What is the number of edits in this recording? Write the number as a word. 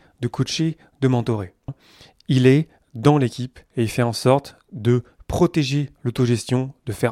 one